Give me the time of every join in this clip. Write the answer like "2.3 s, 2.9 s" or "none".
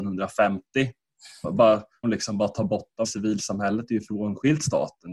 2.0 s, 3.0 s